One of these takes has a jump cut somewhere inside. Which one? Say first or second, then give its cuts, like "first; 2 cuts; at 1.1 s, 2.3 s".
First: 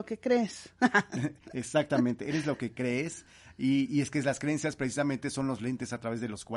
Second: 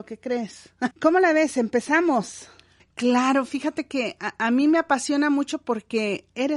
second; 2 cuts; at 0.9 s, 2.8 s